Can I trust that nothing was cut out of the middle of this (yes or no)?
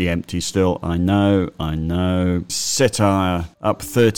no